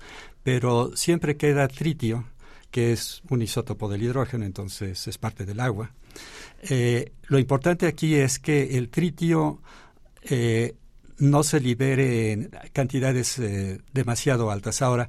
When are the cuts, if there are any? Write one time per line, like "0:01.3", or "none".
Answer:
0:13.8